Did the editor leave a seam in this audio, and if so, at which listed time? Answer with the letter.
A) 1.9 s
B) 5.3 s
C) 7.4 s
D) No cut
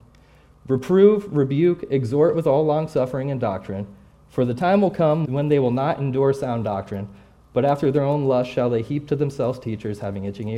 B